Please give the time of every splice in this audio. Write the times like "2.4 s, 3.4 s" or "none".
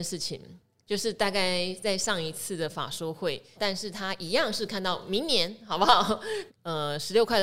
3.5 s, 6.5 s

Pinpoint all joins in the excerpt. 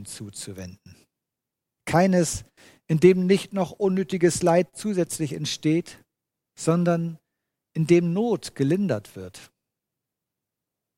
1.8 s

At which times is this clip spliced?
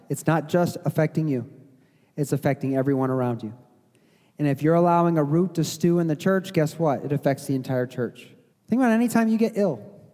8.5 s

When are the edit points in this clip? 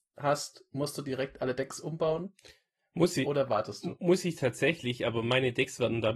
none

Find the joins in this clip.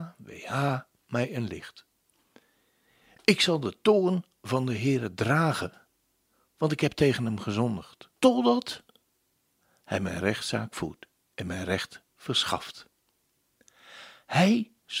8.2 s

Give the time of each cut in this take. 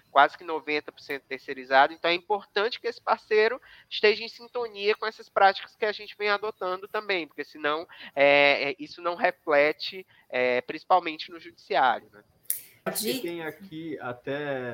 12.9 s

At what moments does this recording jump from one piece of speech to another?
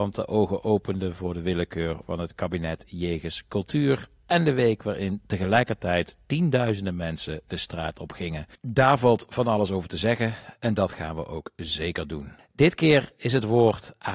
2.0 s, 12.4 s

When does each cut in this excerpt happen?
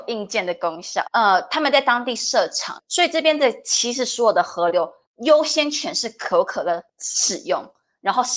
1.0 s, 2.8 s

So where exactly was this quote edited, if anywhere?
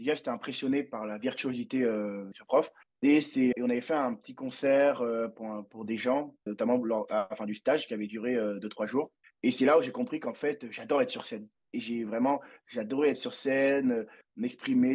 3.5 s, 6.5 s

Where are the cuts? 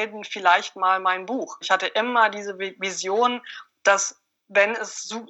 1.6 s

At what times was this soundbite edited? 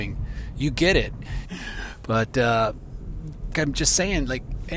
1.4 s, 3.5 s

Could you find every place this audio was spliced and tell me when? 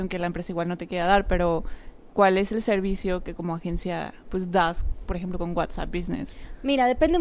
none

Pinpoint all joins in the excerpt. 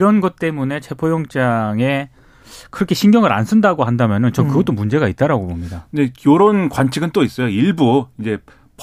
none

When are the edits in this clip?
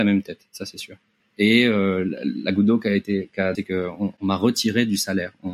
1.2 s, 3.5 s

